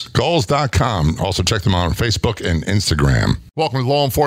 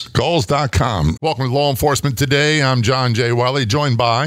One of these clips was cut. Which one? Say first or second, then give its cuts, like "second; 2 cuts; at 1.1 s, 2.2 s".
second; 1 cut; at 1.2 s